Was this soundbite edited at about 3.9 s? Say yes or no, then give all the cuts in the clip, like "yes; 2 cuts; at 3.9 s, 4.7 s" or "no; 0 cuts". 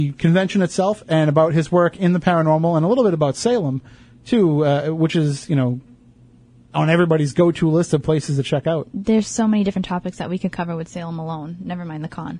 no; 0 cuts